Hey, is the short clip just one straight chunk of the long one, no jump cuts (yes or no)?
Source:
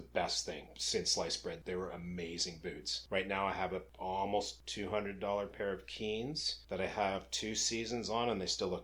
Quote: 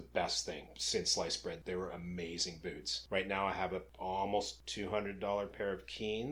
yes